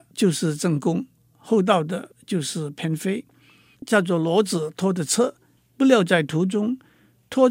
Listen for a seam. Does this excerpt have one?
yes; 1 cut; at 3.7 s

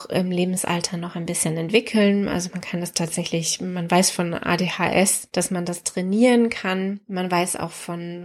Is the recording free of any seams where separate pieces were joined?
yes; 0 cuts

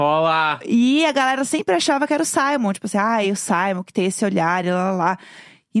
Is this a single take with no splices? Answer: yes; 0 cuts

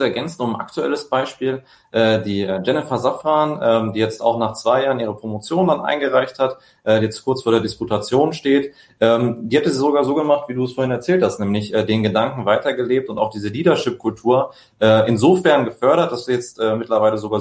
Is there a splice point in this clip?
no; 0 cuts

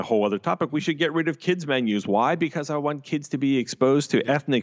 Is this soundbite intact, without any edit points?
yes; 0 cuts

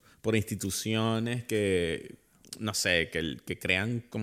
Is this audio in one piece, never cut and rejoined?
yes; 0 cuts

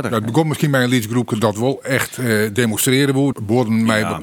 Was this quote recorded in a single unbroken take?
no; 1 cut; at 3.3 s

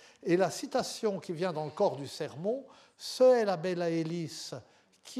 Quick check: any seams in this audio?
no; 0 cuts

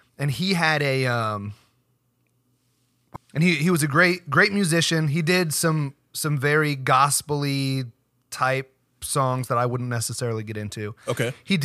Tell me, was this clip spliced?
yes; 1 cut; at 3.2 s

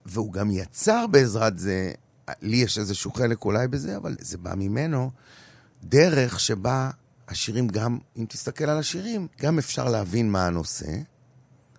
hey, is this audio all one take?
no; 2 cuts; at 4.2 s, 9.3 s

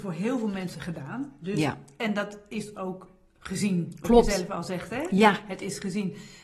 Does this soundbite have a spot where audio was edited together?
no; 0 cuts

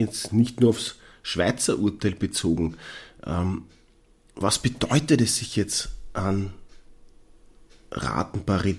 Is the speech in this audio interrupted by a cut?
no; 0 cuts

